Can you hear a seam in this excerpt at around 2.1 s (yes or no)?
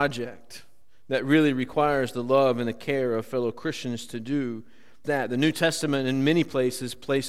no